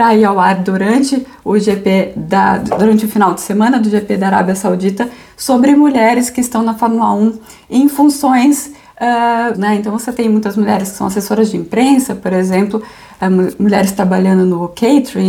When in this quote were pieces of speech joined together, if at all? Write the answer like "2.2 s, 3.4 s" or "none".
9.5 s